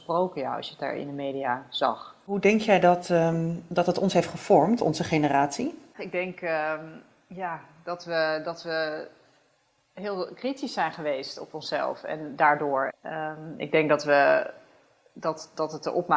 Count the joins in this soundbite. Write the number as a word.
one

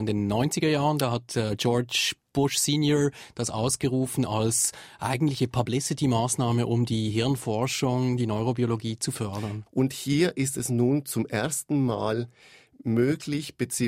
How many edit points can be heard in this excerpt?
one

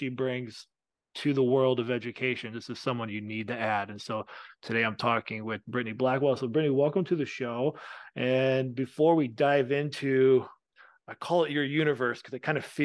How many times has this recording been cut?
zero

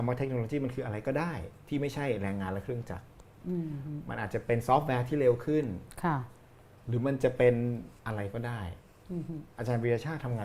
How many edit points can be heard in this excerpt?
one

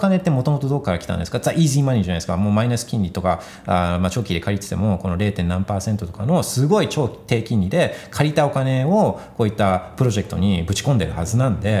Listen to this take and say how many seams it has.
zero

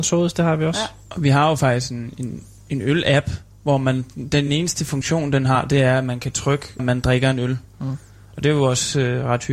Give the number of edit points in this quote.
one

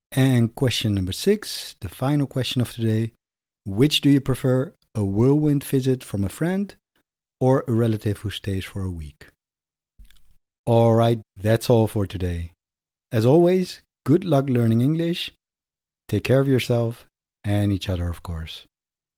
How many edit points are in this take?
one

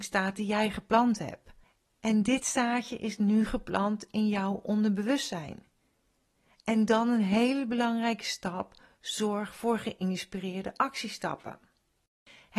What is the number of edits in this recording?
zero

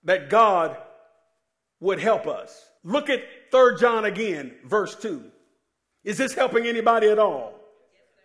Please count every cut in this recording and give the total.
two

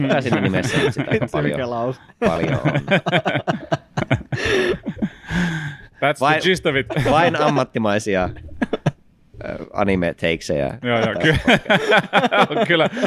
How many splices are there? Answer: zero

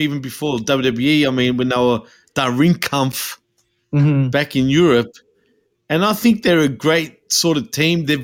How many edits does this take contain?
zero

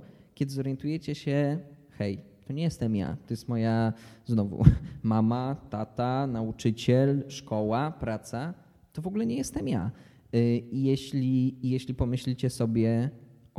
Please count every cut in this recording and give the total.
zero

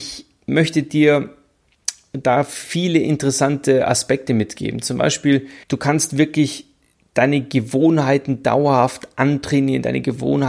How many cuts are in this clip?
one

